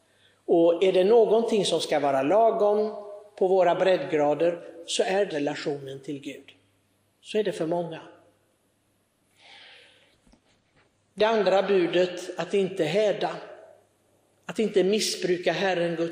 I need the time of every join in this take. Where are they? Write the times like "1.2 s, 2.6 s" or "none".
5.3 s